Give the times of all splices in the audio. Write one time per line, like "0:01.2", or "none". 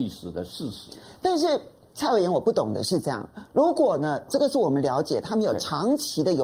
0:04.3